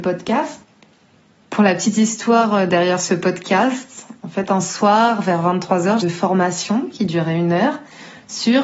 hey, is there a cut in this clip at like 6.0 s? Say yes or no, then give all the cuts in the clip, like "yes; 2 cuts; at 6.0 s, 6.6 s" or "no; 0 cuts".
yes; 1 cut; at 6.0 s